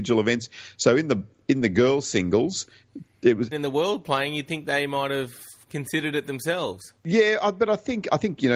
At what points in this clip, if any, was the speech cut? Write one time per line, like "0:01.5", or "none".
0:03.5
0:07.0